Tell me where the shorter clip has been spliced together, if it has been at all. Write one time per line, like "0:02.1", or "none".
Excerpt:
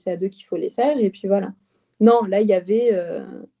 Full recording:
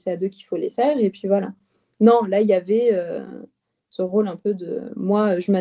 none

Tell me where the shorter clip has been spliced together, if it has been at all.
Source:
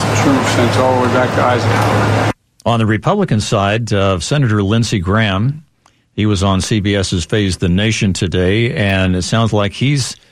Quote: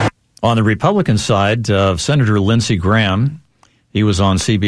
none

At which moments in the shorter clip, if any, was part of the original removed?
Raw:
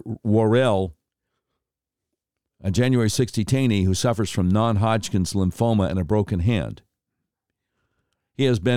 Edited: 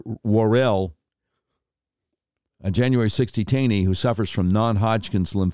none

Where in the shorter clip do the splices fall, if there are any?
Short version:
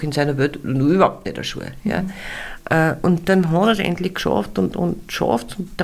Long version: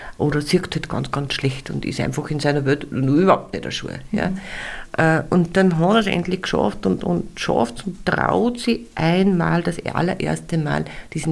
none

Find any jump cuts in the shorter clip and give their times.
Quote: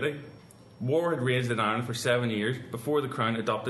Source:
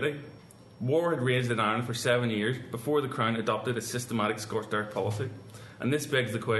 none

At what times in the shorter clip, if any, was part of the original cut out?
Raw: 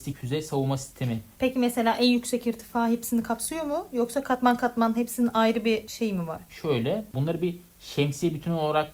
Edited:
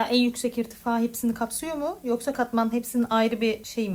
0:02.3

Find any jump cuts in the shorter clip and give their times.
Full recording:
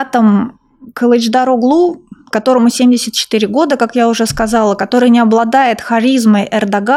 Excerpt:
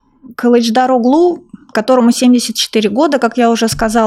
none

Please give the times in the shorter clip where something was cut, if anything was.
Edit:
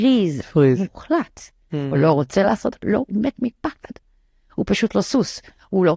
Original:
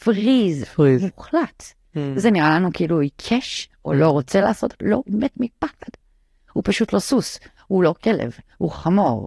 0:01.9

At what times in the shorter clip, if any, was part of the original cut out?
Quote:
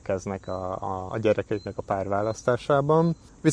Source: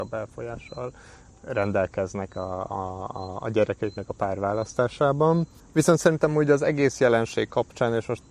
0:01.1

